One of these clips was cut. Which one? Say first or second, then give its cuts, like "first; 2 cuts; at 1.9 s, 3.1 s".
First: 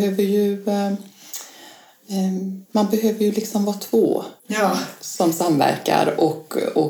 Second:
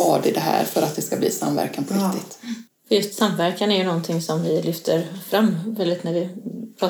first; 2 cuts; at 2.6 s, 4.4 s